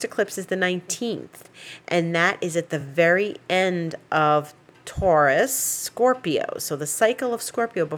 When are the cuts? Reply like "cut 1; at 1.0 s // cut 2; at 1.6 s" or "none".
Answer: none